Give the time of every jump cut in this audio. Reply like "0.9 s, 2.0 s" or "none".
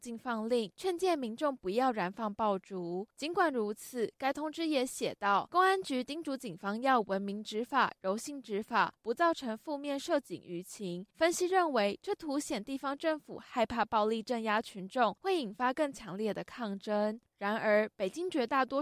9.0 s, 17.3 s

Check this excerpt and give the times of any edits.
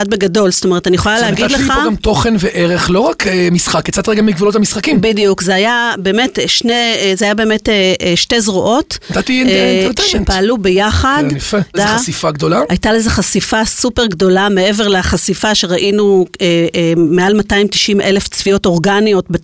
11.7 s

